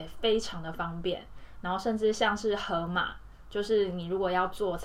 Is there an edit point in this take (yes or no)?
no